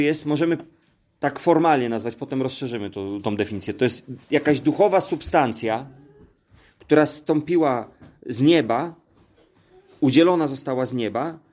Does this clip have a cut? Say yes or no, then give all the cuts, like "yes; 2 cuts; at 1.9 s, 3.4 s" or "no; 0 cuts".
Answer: no; 0 cuts